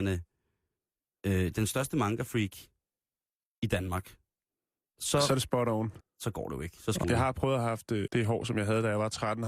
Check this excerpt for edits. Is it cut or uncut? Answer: cut